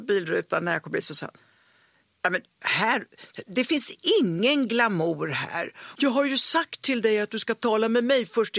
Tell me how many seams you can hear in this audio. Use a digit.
1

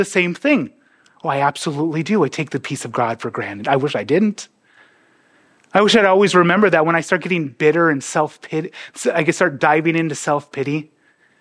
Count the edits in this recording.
0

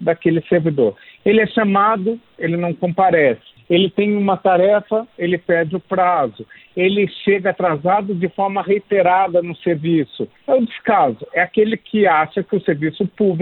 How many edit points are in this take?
0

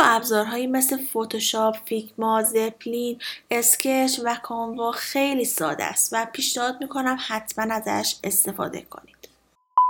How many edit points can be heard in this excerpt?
0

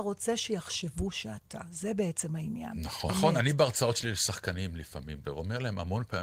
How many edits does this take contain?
2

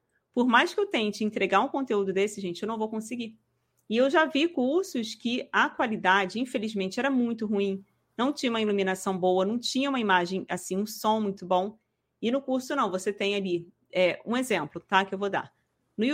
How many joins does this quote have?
0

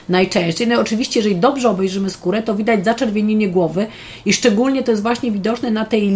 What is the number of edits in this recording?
0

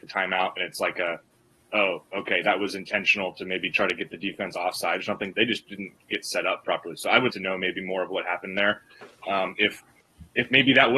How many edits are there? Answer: 2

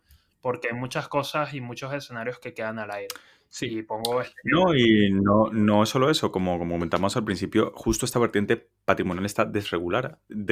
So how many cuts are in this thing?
0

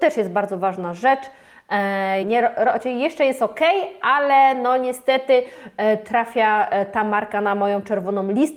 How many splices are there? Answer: 1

